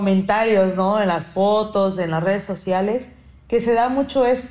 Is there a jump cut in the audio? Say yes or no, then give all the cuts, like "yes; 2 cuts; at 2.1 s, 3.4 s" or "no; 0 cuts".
no; 0 cuts